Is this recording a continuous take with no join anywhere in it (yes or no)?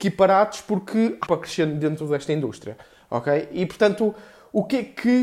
no